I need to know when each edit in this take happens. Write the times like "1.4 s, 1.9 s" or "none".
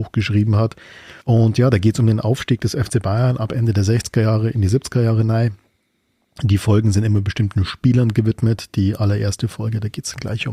1.2 s